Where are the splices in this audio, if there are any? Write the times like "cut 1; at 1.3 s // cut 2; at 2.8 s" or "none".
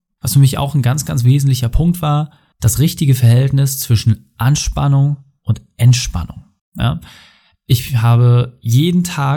none

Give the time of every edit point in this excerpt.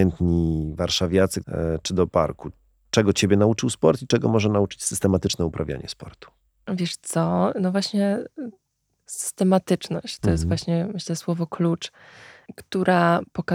cut 1; at 1.4 s

